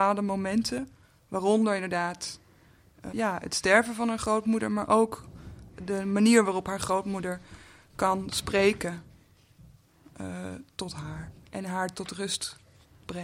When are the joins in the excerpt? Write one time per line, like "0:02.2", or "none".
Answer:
0:03.1

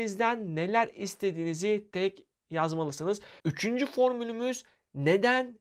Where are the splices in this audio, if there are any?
0:01.9
0:03.4

